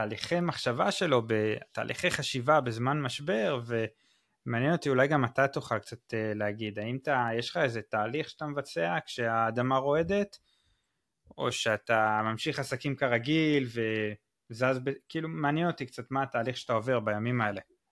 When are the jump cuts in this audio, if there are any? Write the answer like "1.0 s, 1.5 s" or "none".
none